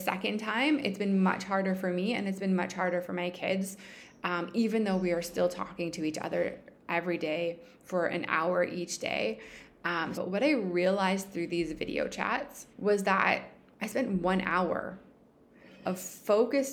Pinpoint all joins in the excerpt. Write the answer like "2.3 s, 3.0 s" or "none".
10.1 s, 12.7 s

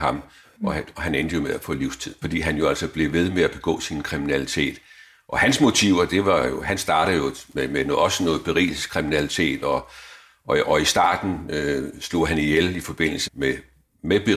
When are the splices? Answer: 2.2 s, 13.3 s

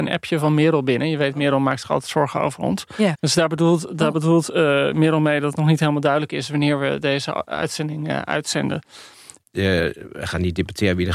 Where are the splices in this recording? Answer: 3.1 s, 9.4 s

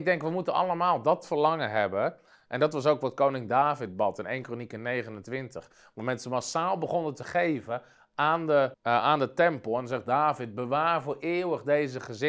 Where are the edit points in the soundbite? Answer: 8.7 s

